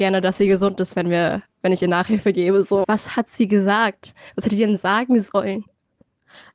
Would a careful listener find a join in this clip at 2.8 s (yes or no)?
yes